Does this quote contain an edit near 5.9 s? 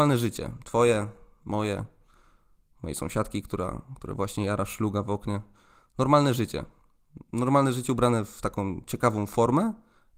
no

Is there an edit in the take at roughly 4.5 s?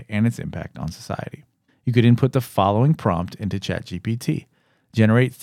no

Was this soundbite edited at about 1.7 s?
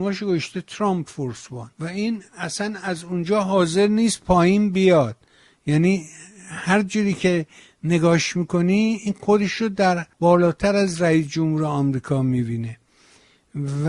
yes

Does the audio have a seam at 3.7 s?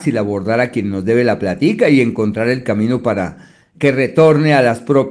yes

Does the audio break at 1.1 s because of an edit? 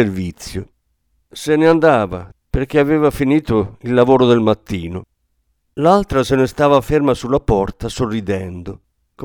no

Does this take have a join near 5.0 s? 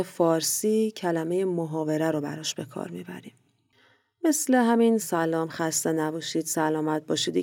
yes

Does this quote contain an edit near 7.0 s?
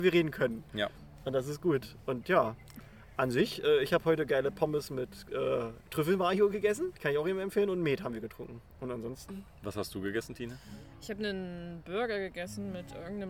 yes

